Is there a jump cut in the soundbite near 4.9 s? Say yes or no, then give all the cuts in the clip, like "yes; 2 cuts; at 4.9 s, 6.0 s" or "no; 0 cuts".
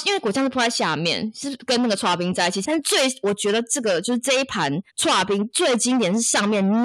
yes; 2 cuts; at 2.6 s, 4.9 s